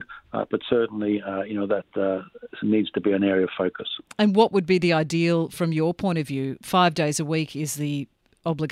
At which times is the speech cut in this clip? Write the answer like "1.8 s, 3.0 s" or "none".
2.6 s